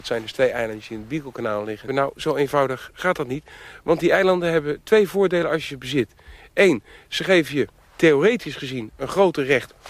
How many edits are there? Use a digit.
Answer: 1